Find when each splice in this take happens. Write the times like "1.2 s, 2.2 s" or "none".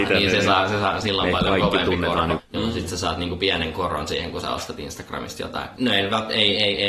2.4 s, 5.8 s